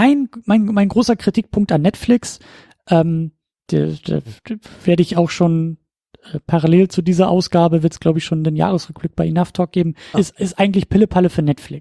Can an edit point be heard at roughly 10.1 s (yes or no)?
yes